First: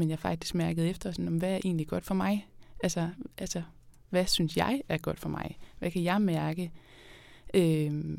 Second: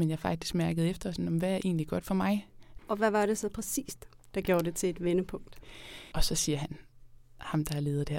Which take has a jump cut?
second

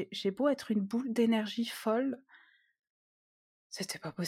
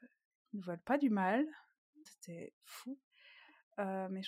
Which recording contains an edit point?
second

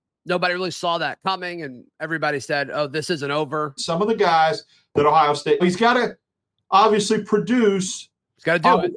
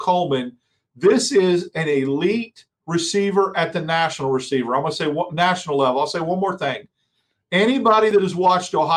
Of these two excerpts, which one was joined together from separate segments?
first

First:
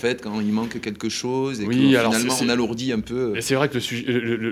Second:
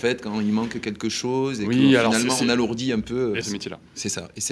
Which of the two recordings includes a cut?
second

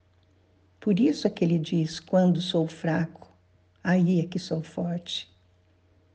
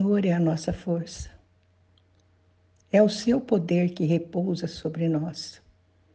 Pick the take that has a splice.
second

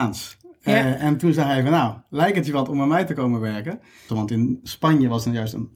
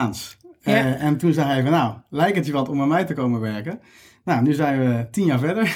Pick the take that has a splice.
first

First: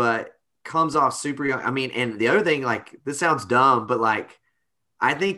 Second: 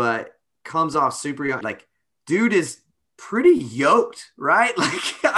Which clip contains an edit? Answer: second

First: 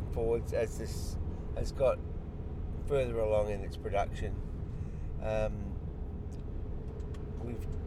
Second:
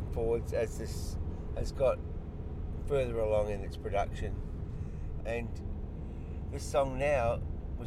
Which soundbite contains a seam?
second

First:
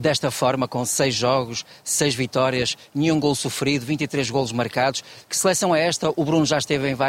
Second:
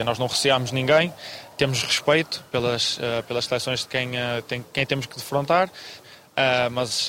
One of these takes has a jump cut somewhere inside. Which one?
second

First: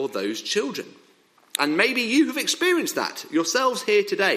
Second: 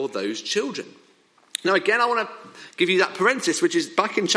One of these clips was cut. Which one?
first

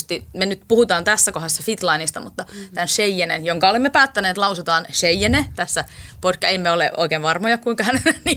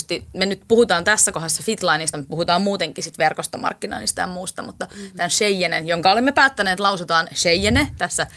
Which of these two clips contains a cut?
first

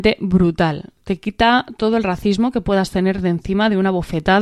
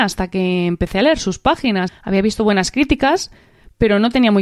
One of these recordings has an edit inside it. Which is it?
second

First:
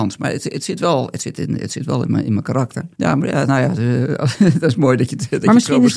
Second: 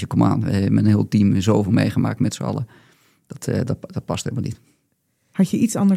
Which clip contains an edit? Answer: first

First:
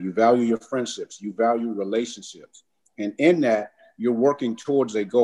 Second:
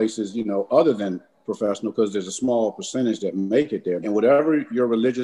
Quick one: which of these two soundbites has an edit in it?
second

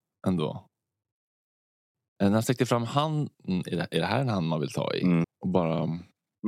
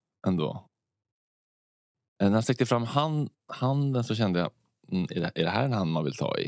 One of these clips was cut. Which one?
first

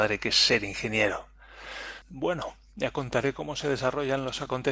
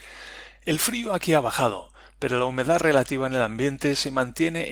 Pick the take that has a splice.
first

